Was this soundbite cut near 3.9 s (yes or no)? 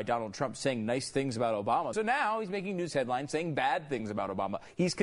no